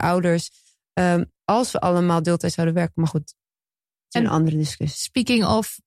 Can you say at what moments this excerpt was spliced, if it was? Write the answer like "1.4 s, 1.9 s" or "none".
none